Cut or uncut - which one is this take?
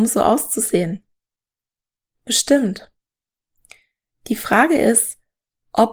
uncut